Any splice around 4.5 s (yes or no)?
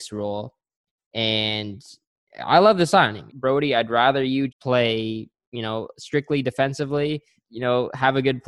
yes